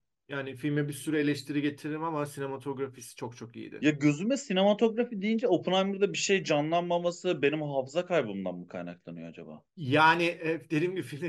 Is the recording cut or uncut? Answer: uncut